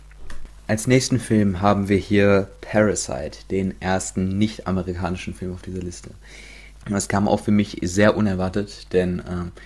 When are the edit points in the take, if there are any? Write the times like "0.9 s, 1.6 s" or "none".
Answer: 6.8 s